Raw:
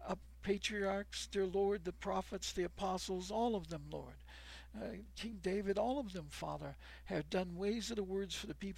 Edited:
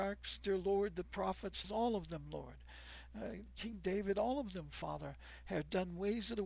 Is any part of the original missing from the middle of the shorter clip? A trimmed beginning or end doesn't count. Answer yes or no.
yes